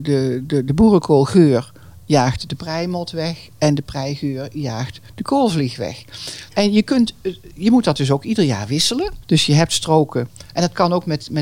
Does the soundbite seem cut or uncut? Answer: cut